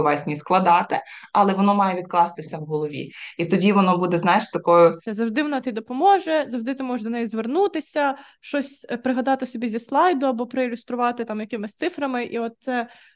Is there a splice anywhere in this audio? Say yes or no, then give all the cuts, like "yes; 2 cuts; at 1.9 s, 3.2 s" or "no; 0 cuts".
yes; 1 cut; at 5.1 s